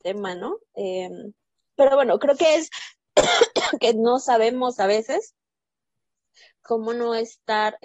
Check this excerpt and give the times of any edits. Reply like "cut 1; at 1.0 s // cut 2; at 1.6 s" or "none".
cut 1; at 1.7 s